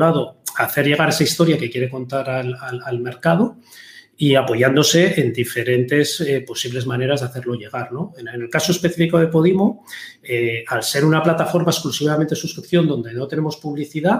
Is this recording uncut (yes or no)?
yes